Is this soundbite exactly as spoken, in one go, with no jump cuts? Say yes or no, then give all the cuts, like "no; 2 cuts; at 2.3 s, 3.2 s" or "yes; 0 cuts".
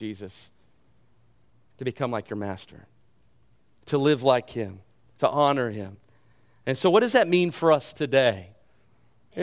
yes; 0 cuts